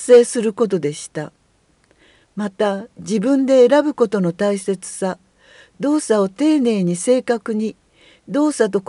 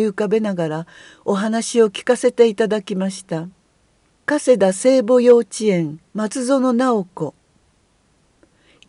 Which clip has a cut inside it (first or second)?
second